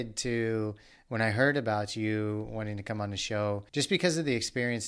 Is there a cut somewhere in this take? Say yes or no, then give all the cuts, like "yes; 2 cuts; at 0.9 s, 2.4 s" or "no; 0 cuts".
yes; 1 cut; at 3.7 s